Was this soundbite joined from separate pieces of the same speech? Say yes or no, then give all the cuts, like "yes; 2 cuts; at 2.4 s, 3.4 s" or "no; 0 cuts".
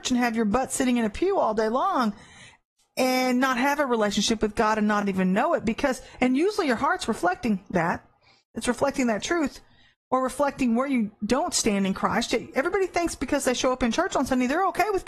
no; 0 cuts